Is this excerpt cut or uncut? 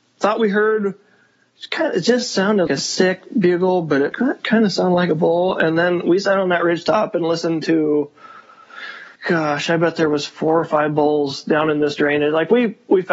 cut